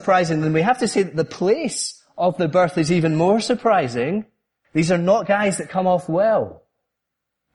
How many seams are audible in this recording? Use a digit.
1